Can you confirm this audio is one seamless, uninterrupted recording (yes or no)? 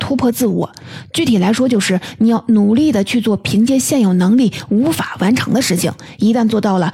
yes